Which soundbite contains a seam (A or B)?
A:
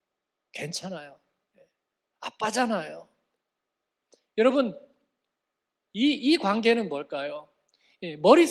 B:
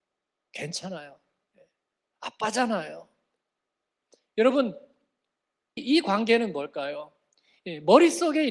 B